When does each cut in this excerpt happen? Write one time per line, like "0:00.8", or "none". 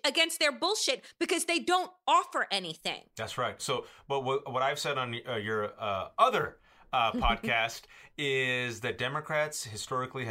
0:03.6